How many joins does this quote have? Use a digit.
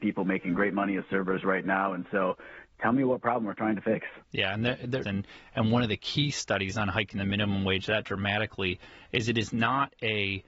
1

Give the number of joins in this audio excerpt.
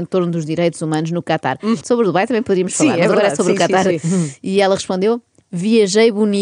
1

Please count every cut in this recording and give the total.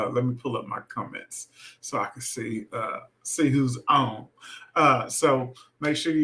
0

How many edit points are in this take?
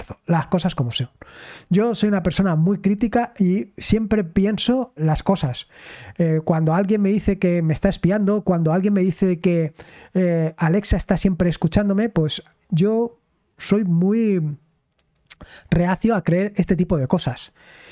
1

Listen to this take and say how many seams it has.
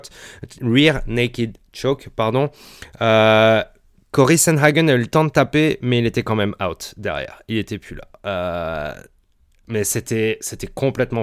0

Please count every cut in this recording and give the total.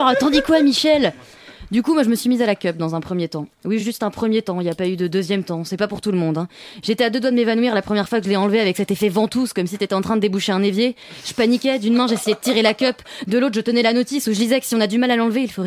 0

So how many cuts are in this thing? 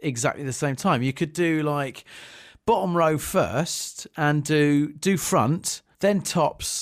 1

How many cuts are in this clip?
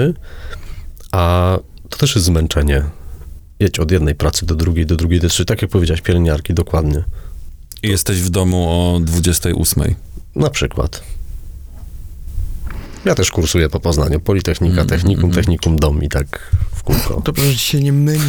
0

